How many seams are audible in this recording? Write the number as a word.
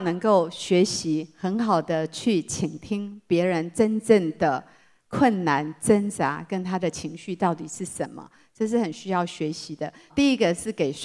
one